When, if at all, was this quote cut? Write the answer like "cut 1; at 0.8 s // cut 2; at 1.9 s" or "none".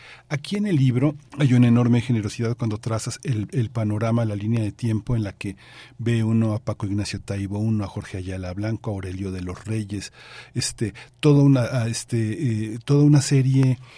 cut 1; at 1.3 s